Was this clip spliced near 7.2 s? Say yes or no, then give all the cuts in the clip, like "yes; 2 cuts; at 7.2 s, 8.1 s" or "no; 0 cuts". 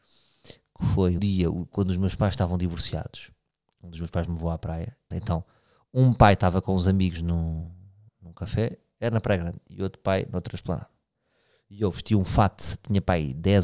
no; 2 cuts; at 1.2 s, 5.1 s